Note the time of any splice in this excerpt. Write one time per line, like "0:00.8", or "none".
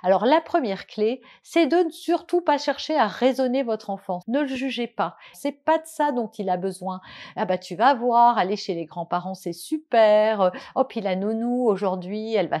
0:04.2
0:05.3